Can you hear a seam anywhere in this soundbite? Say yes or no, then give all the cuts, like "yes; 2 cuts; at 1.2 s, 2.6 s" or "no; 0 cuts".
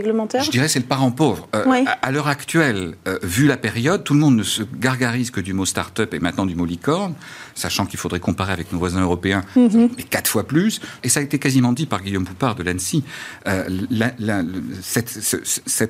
yes; 2 cuts; at 10.0 s, 11.0 s